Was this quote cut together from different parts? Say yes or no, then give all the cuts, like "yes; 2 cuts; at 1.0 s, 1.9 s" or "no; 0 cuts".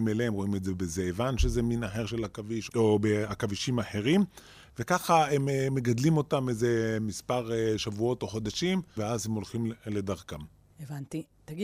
yes; 2 cuts; at 2.7 s, 9.0 s